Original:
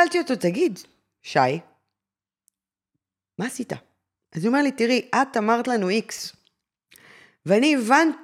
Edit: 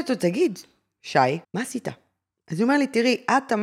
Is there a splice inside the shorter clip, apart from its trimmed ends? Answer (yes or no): yes